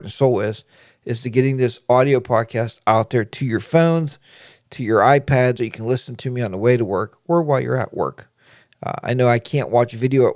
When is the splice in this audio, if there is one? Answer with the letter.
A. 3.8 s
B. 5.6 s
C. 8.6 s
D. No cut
B